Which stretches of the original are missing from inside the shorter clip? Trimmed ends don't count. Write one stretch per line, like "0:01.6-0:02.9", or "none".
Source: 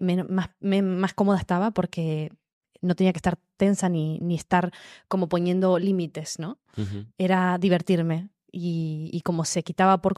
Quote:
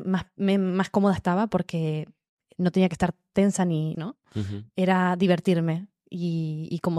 0:04.2-0:06.4